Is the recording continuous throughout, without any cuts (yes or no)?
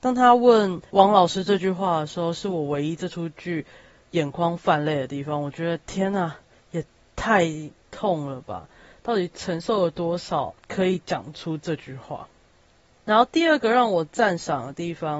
yes